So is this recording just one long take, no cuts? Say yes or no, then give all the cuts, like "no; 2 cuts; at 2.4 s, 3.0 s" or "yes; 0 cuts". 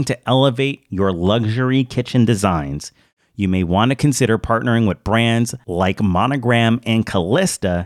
yes; 0 cuts